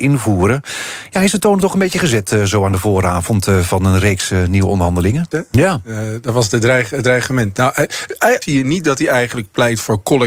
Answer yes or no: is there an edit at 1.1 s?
no